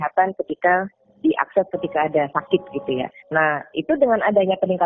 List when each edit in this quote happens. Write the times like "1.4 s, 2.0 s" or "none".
3.2 s